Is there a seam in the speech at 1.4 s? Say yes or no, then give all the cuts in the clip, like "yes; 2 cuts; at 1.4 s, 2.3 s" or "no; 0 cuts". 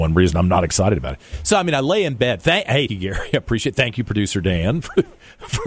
no; 1 cut; at 2.9 s